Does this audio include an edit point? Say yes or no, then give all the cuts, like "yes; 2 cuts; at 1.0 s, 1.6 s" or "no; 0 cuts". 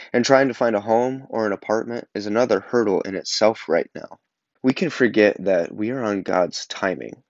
yes; 1 cut; at 4.6 s